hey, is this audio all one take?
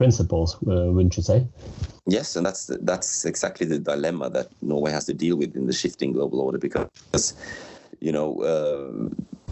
yes; 0 cuts

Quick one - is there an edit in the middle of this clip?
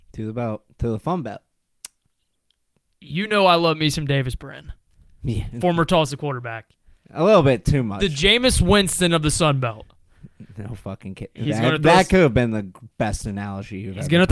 no; 0 cuts

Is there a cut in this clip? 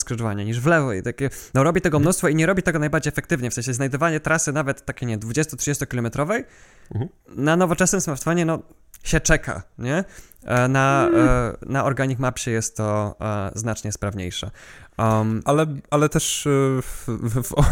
no; 0 cuts

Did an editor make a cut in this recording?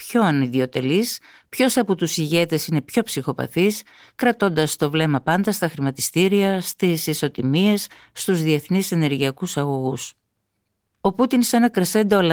no; 0 cuts

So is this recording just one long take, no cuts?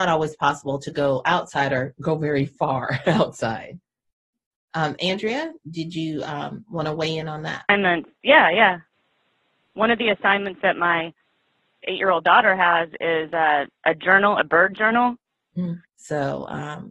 no; 2 cuts; at 13.7 s, 15.8 s

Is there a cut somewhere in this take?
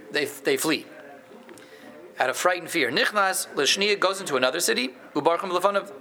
no; 0 cuts

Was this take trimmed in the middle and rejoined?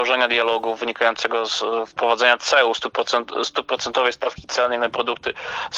no; 0 cuts

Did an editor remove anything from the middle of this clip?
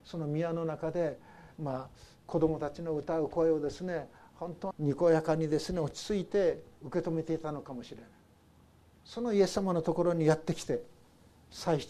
yes; 1 cut; at 4.7 s

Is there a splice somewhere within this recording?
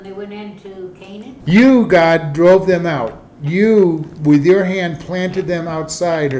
yes; 1 cut; at 1.4 s

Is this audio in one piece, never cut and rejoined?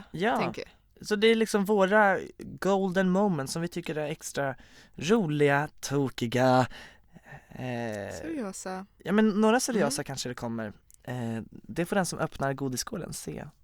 yes; 0 cuts

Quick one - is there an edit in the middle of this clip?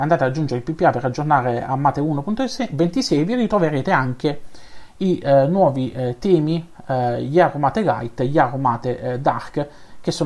no; 0 cuts

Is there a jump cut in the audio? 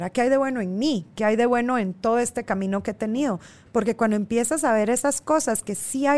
no; 0 cuts

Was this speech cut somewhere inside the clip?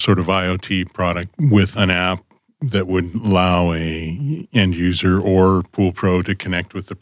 yes; 1 cut; at 1.4 s

